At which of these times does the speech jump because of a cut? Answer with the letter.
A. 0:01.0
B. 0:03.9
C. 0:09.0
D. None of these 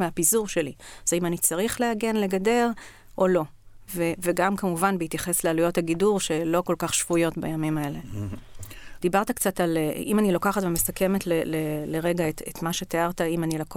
C